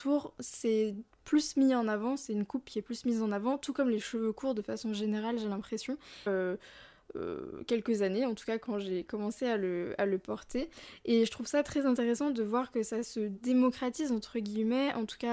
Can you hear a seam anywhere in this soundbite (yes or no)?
yes